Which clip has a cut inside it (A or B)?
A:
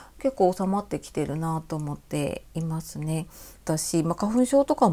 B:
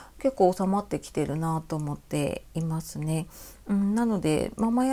A